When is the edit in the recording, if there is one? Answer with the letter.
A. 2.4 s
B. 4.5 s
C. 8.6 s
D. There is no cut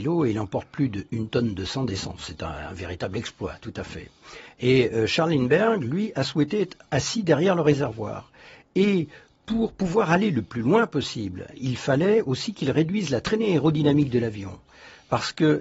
D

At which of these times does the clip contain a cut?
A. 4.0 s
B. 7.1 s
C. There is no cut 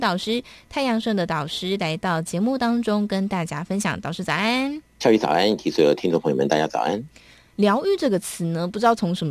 C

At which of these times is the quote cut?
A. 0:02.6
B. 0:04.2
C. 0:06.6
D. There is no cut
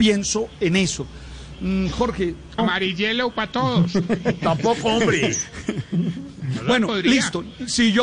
A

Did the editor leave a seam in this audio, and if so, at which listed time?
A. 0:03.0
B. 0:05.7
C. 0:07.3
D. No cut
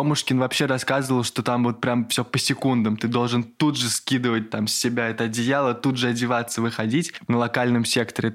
C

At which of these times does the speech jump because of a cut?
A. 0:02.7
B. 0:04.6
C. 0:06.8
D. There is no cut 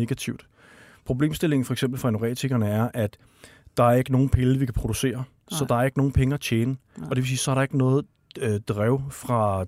D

